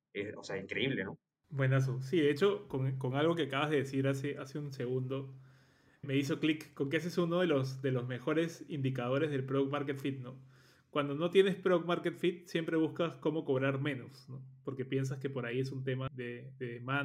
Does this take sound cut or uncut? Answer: cut